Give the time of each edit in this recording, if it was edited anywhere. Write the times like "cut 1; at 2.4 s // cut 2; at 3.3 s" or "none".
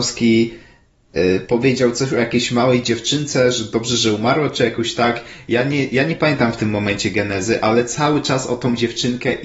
none